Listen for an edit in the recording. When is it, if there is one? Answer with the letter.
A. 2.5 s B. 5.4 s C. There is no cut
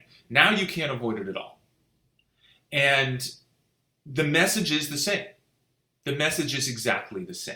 C